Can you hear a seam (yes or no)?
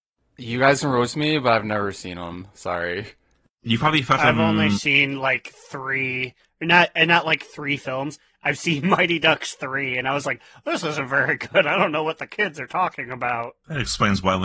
no